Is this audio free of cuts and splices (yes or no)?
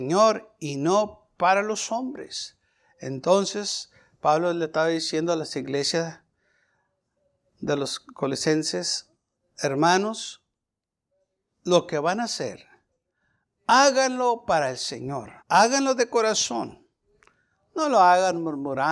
no